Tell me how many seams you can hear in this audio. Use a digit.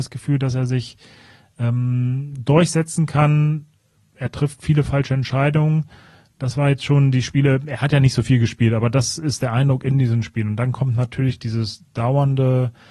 0